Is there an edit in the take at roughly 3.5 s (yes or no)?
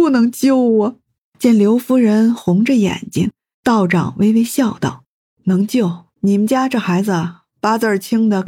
yes